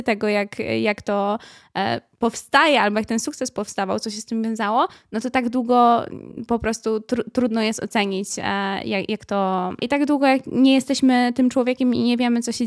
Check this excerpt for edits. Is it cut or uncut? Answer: cut